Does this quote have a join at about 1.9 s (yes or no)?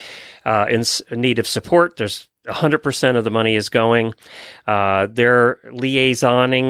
no